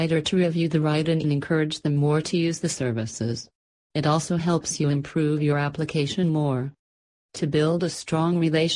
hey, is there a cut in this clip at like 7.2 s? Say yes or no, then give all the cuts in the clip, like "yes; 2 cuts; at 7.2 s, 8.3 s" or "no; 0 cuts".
yes; 2 cuts; at 1.2 s, 7.2 s